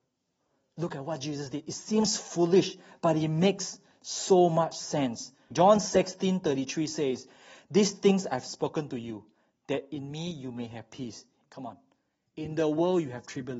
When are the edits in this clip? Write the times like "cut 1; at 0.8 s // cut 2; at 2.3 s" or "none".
cut 1; at 5.5 s // cut 2; at 11.4 s